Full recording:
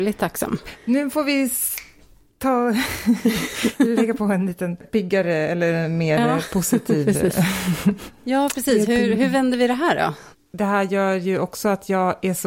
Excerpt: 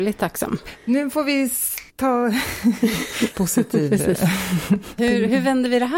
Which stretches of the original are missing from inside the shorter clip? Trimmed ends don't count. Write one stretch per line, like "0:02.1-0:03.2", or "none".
0:01.9-0:02.3
0:03.8-0:06.5
0:08.1-0:08.9